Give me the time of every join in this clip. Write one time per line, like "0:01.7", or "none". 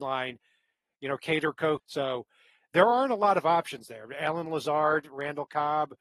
0:01.8